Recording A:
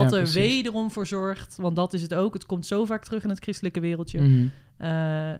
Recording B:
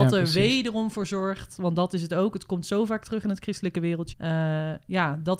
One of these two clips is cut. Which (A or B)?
B